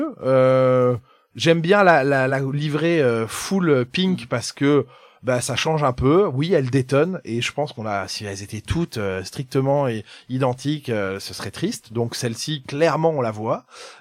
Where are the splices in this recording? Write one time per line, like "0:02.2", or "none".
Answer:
none